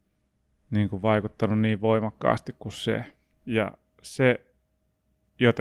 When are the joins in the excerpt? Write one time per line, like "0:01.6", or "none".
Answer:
0:03.3

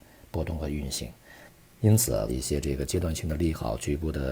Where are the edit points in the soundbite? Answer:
0:02.3

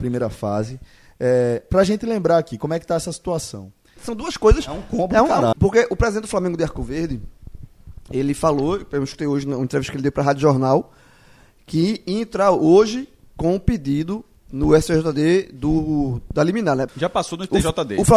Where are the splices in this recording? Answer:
0:04.0
0:05.5
0:16.9

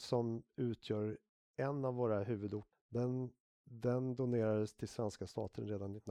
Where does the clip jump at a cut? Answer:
0:02.7

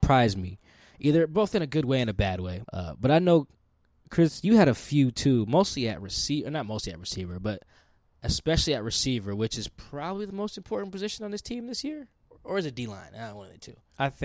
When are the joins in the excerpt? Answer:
0:02.6

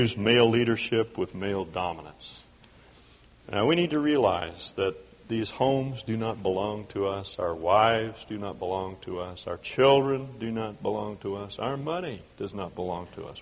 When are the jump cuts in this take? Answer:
none

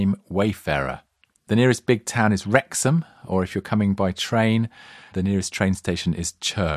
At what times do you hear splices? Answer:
0:01.3
0:05.1

